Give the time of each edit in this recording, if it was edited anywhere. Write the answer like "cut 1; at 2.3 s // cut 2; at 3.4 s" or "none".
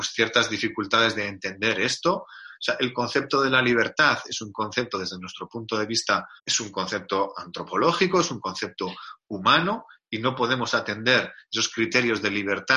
cut 1; at 6.4 s